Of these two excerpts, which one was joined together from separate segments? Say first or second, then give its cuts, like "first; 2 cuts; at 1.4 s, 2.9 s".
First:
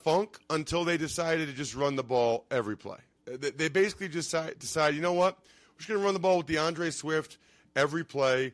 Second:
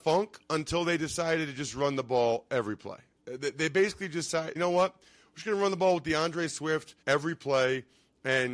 second; 2 cuts; at 4.6 s, 7.0 s